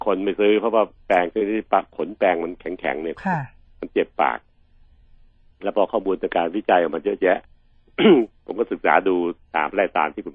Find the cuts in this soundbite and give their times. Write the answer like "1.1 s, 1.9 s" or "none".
none